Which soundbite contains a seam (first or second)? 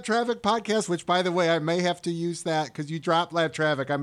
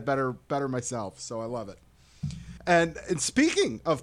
second